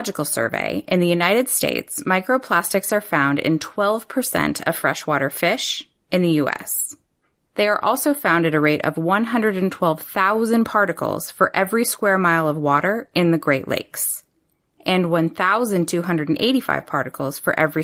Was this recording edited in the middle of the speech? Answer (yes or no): no